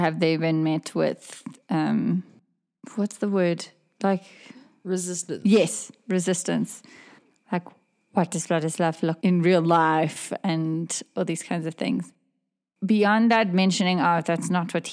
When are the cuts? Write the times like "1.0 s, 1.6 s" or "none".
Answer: 9.2 s